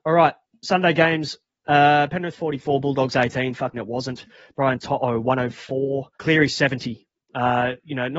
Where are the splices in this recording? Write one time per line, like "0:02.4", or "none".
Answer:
0:03.7
0:06.1